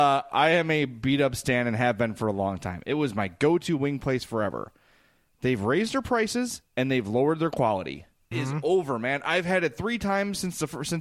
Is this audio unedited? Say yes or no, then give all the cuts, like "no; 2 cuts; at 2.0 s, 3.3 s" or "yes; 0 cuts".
no; 2 cuts; at 5.3 s, 8.3 s